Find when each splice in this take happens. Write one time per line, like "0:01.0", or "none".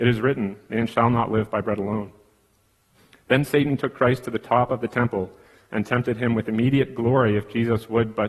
none